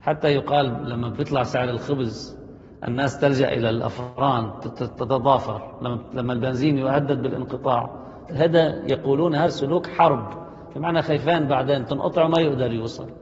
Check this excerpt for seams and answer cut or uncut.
cut